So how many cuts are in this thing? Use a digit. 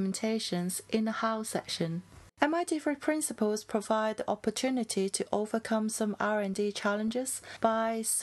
1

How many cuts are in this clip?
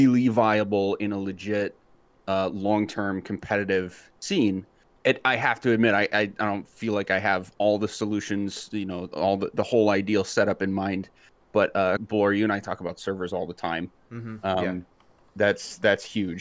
1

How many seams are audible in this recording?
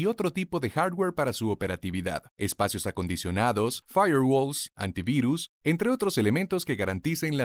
1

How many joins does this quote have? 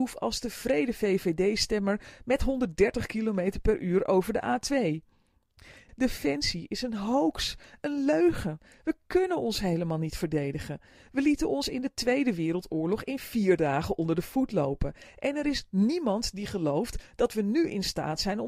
1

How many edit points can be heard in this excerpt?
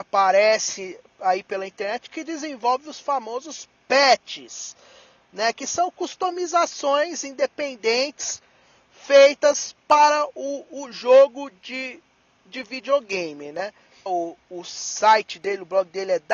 1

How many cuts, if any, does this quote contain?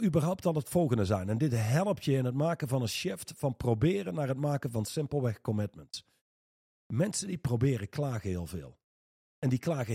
0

